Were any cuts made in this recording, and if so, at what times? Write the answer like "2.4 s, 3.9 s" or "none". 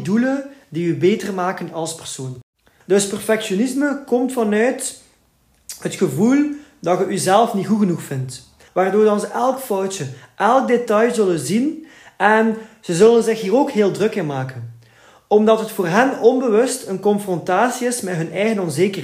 2.8 s, 8.7 s